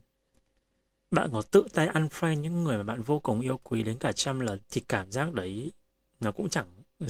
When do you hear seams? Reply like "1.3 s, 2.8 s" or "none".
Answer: 4.6 s